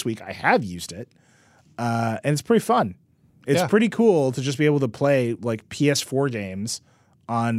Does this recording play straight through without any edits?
yes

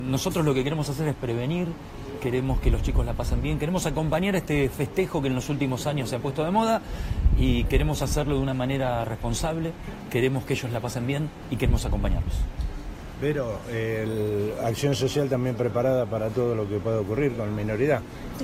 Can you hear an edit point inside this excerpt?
no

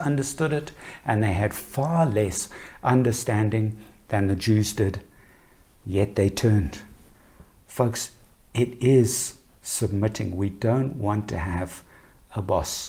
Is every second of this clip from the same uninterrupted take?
yes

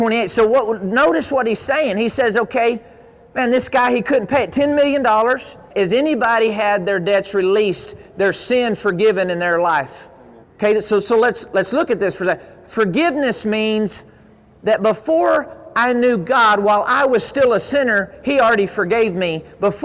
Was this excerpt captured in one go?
no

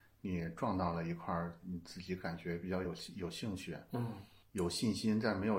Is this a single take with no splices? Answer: yes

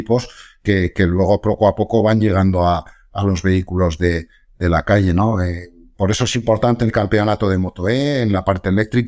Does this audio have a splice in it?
no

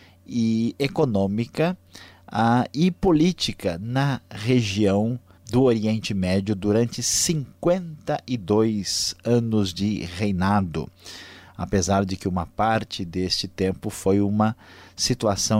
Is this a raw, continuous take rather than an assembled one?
yes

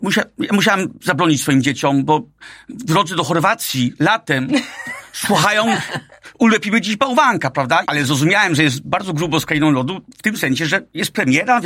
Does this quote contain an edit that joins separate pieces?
yes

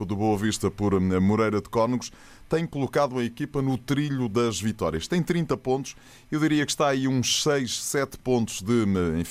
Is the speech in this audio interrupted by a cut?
no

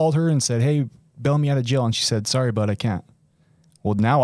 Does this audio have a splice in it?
no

